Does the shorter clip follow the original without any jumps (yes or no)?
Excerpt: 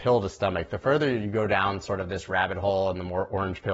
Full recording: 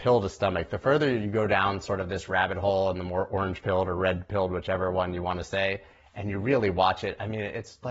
yes